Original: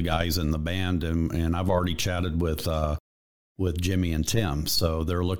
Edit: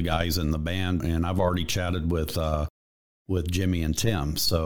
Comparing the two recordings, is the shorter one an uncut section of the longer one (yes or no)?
no